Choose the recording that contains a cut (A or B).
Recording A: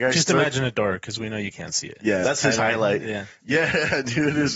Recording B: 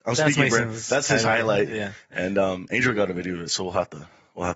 A